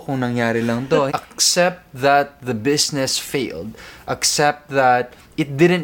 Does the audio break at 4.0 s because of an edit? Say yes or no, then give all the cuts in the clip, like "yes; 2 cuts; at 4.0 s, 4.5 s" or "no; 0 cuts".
no; 1 cut; at 1.1 s